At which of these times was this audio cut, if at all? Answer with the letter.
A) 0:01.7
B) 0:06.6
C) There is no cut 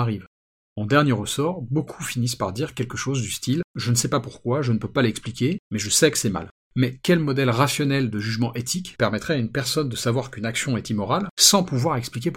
C